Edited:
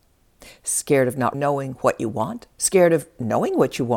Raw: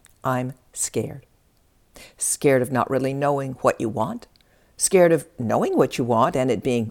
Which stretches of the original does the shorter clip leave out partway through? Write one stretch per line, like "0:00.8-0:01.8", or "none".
0:02.9-0:03.1
0:04.3-0:04.7